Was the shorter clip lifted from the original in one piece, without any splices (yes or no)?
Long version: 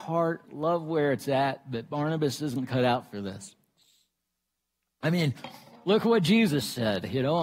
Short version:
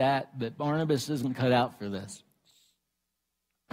yes